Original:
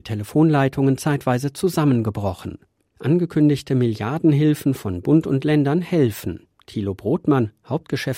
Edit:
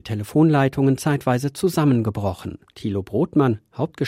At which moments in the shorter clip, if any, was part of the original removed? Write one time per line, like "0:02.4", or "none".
0:02.7